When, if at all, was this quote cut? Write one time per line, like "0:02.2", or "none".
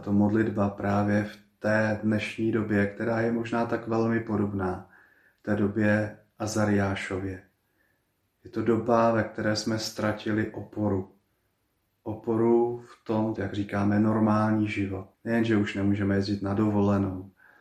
0:13.4
0:15.1

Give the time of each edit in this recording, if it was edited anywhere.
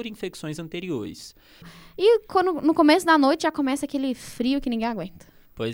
0:01.6

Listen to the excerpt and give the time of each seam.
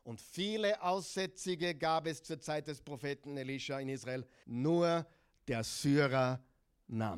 0:04.4

